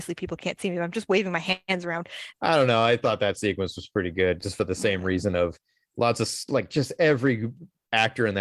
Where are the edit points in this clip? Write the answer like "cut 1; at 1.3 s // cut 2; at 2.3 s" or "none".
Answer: cut 1; at 2.3 s